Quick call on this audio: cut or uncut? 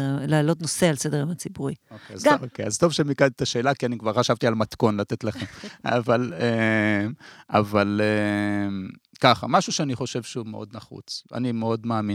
cut